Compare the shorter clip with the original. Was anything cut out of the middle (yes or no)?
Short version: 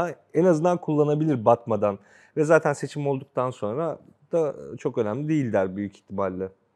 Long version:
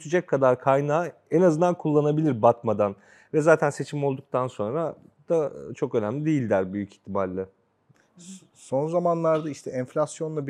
no